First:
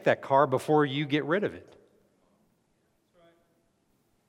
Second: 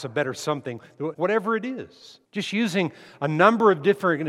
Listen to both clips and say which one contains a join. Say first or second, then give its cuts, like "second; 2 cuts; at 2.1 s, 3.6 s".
second; 2 cuts; at 1.1 s, 2.2 s